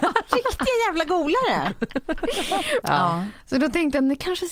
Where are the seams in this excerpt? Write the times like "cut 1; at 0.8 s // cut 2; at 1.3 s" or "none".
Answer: cut 1; at 2.8 s